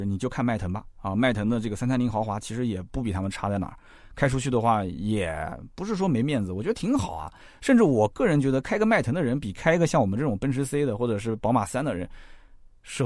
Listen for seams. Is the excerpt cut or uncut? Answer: uncut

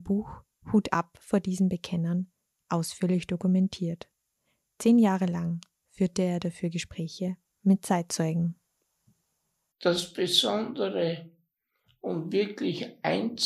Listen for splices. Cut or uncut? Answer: uncut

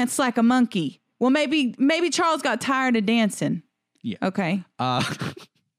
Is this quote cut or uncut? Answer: uncut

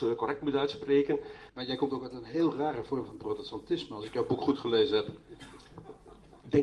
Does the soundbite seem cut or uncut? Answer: cut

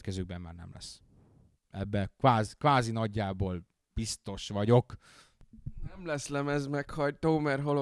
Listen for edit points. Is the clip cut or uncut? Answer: uncut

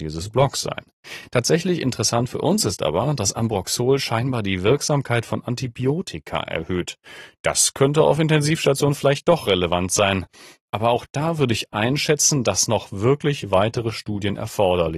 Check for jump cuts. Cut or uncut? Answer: uncut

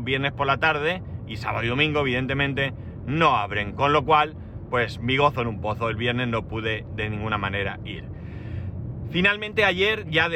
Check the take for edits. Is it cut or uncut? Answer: uncut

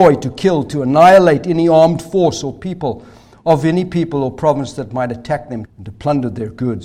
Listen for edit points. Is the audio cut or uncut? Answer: cut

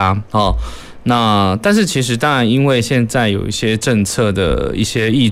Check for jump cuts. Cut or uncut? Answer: uncut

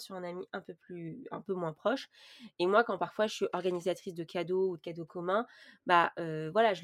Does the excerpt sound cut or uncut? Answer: uncut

